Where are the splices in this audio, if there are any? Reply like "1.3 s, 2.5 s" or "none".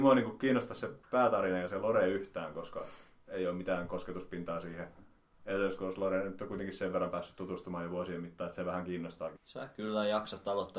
1.0 s, 9.4 s